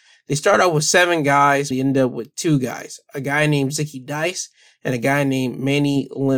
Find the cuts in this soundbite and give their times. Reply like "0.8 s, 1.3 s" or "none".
1.7 s